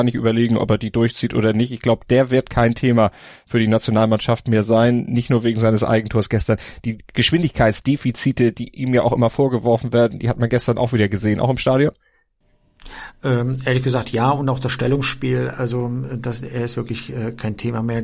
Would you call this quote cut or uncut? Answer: uncut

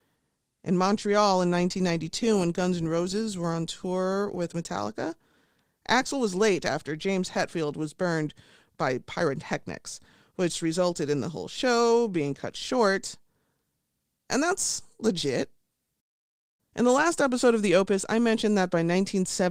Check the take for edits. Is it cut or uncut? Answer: cut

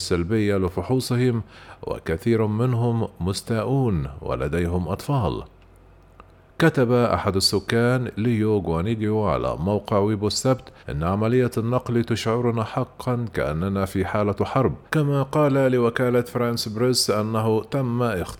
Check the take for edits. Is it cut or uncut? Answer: cut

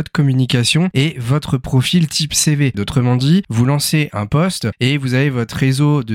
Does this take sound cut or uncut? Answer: cut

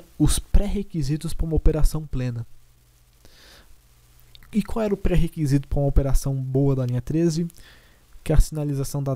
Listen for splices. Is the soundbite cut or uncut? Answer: uncut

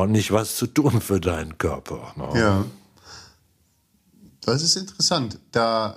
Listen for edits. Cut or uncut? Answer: uncut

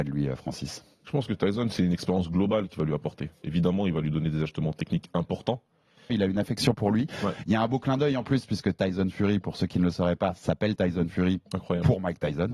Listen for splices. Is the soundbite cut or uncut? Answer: cut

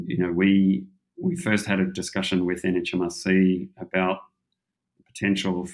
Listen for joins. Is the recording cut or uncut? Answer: uncut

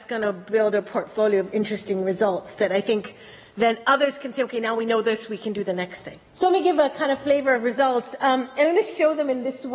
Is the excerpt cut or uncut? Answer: cut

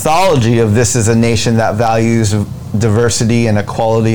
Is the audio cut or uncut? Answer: uncut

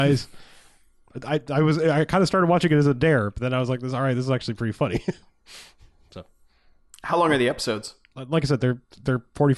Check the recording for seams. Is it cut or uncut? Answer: uncut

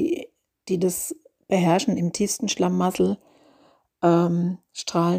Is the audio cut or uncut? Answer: uncut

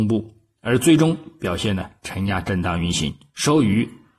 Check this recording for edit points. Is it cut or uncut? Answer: uncut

